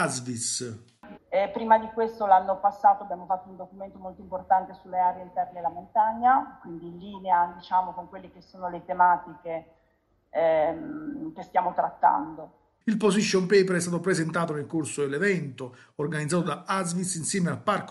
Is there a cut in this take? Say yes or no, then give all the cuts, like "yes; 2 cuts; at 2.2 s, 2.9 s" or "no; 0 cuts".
yes; 2 cuts; at 1.2 s, 12.8 s